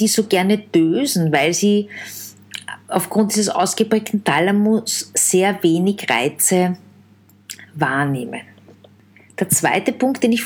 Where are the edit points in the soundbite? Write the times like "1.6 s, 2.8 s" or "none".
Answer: none

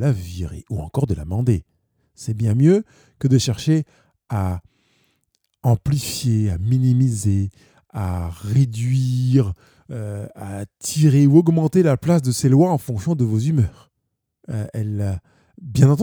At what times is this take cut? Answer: 14.4 s

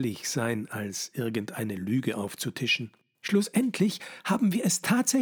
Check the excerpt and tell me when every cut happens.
none

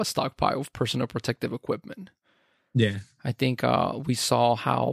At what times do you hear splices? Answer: none

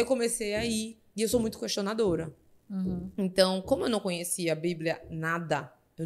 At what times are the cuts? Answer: none

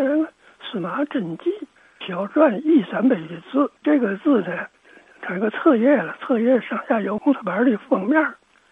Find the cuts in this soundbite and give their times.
2.0 s, 3.8 s

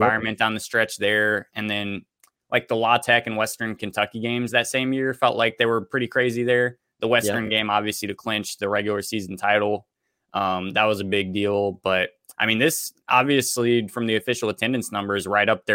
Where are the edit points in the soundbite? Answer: none

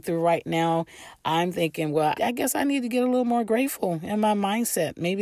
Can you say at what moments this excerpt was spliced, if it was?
2.2 s

